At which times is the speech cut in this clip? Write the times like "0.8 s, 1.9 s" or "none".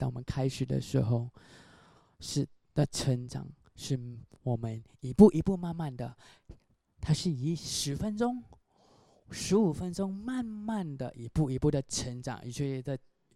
none